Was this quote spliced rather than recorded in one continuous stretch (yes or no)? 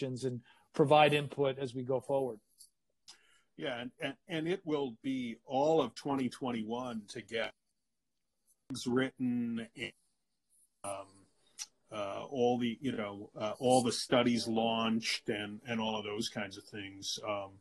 no